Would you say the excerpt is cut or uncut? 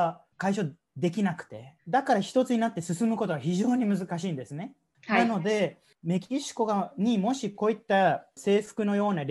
cut